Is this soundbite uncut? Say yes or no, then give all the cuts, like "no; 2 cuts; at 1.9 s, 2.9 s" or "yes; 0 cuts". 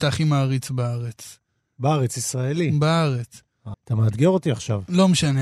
no; 1 cut; at 3.7 s